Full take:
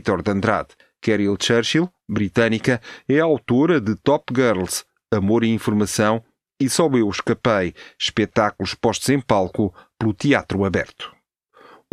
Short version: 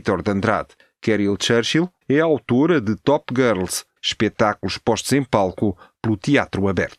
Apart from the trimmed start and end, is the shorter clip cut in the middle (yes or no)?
yes